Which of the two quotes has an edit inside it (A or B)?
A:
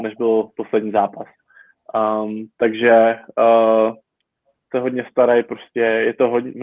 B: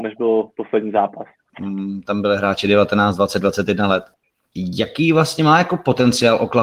B